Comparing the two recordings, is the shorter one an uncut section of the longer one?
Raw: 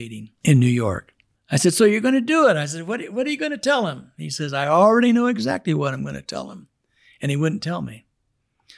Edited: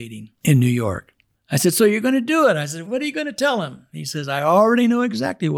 no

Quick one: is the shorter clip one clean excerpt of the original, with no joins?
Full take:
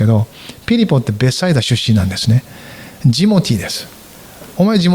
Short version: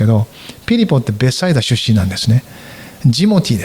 yes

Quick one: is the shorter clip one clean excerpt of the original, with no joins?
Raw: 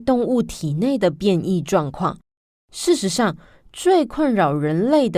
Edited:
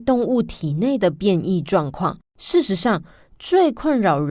no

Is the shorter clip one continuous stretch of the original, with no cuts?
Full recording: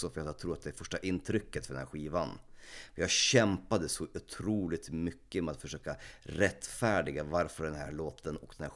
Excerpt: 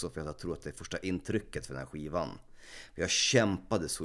yes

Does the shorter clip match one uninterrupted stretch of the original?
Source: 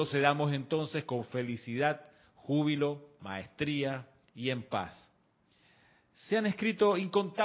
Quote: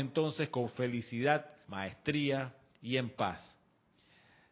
no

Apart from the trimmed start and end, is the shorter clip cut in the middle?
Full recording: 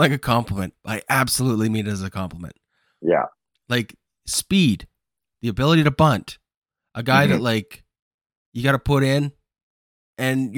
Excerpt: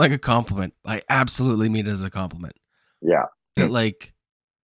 yes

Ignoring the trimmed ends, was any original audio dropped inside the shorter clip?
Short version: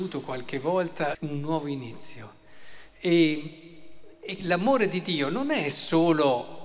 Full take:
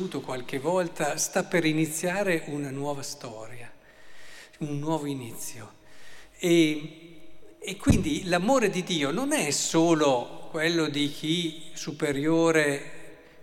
yes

